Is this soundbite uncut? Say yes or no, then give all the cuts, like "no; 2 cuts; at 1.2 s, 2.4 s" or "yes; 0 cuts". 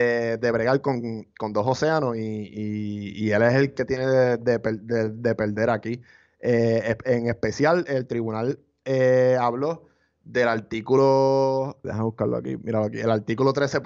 no; 1 cut; at 11.8 s